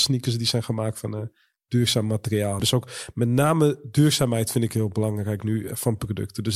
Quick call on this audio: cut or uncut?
cut